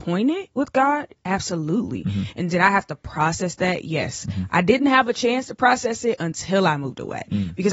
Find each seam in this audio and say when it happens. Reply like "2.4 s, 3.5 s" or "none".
none